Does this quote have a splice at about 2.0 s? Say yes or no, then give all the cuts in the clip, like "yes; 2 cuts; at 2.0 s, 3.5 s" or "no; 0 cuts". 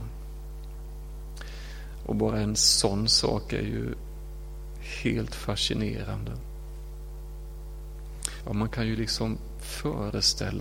yes; 2 cuts; at 2.0 s, 8.4 s